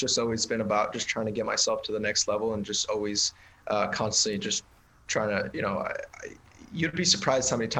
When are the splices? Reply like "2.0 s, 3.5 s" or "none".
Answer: none

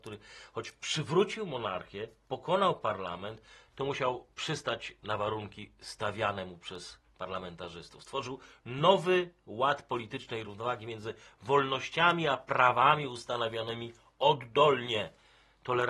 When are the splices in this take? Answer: 10.4 s

